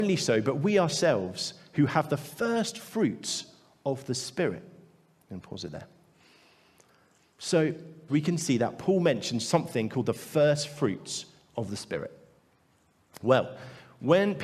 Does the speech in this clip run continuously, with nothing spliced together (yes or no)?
no